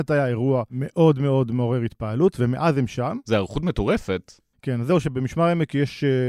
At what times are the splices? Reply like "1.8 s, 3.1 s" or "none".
none